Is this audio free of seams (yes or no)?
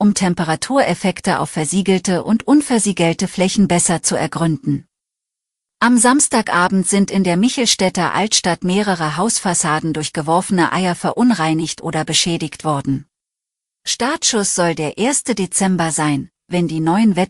no